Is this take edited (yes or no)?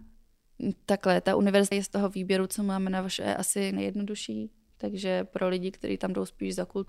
yes